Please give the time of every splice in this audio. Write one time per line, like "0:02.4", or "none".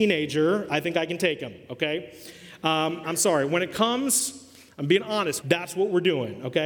0:03.0
0:05.4